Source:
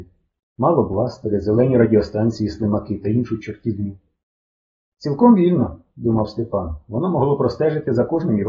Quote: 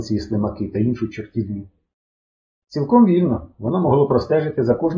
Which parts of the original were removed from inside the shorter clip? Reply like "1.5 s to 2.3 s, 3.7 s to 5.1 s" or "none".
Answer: 5.8 s to 6.8 s